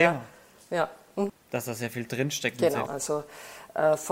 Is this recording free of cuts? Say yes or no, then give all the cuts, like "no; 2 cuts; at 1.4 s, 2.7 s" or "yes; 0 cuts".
no; 2 cuts; at 1.3 s, 2.9 s